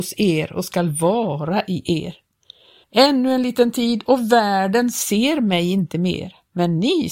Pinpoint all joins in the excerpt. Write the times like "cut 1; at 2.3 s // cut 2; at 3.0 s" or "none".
cut 1; at 2.8 s